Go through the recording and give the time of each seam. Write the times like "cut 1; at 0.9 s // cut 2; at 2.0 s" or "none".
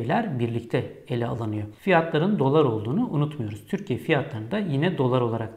cut 1; at 1.7 s